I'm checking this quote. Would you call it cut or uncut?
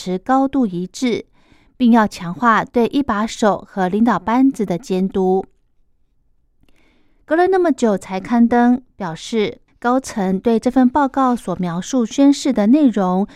cut